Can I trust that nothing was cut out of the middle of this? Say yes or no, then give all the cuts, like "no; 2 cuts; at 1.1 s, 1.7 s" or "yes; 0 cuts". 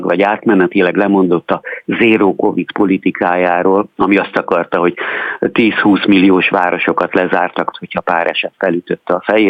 no; 2 cuts; at 3.9 s, 7.7 s